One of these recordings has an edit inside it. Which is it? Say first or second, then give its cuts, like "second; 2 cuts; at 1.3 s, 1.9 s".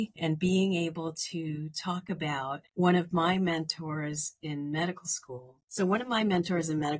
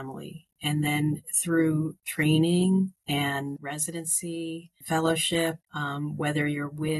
second; 1 cut; at 5.6 s